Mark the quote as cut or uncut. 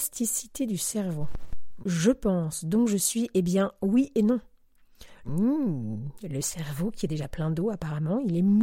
cut